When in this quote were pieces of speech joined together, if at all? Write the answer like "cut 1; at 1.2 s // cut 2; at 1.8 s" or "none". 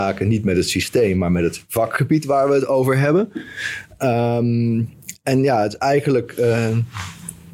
none